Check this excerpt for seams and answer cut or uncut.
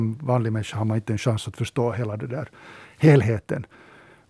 uncut